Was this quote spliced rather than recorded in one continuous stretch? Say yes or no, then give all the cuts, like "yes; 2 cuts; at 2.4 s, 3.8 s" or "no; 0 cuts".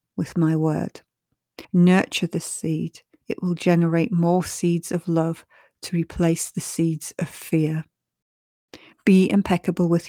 yes; 2 cuts; at 3.2 s, 8.9 s